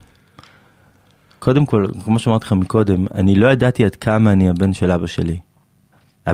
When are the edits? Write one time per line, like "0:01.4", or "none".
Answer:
none

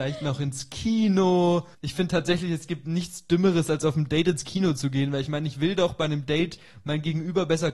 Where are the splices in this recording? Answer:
0:01.7

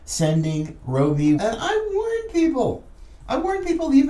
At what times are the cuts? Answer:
0:01.4

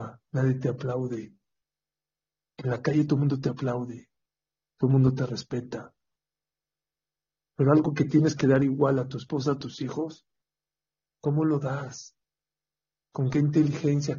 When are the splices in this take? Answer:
none

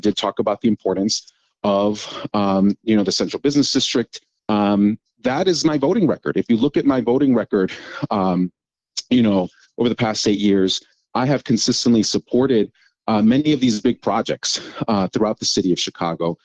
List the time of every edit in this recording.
0:04.4

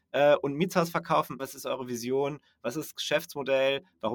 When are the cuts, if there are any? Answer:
0:01.4

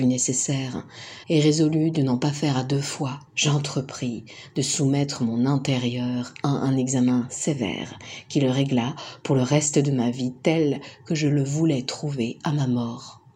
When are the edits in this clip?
0:01.2
0:03.3

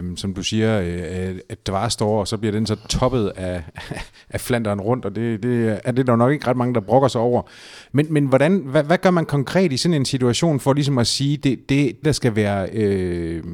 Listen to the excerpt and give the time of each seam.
0:07.9
0:12.0

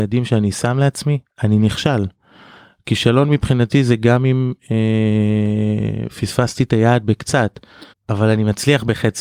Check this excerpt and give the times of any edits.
0:07.9

